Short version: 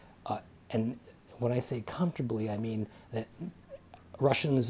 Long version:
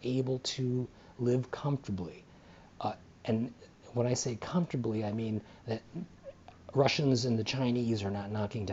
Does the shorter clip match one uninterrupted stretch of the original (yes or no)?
yes